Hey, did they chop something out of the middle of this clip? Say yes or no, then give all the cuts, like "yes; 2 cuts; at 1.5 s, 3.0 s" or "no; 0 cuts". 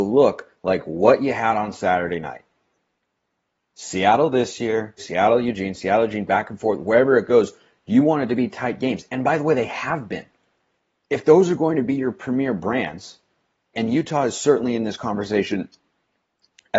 yes; 2 cuts; at 5.0 s, 13.7 s